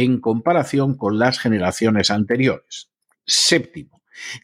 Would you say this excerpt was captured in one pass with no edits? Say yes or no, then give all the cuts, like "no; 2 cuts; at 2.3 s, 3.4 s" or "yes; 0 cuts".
no; 1 cut; at 3.1 s